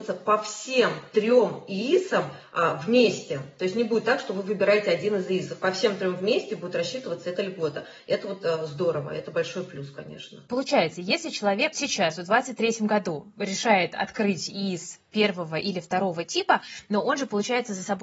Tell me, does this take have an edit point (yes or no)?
yes